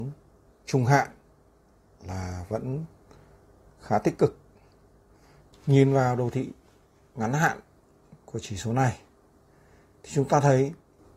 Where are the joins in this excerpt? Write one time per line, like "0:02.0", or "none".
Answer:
0:05.5